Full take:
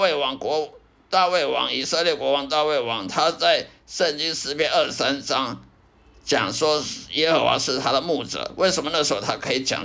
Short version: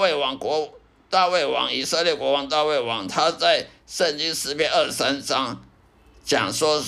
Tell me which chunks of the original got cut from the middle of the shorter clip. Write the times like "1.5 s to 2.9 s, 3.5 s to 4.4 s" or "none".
none